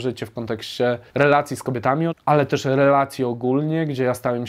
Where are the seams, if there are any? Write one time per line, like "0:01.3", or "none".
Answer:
0:01.1
0:02.1